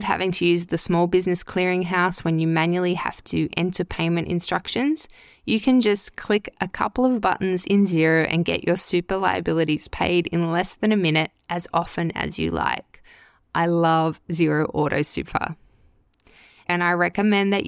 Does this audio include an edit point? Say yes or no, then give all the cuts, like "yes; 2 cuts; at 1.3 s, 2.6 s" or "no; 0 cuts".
yes; 1 cut; at 16.6 s